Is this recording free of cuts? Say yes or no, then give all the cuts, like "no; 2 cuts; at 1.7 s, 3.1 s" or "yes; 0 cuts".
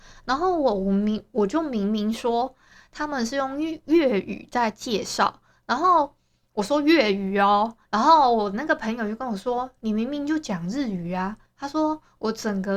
yes; 0 cuts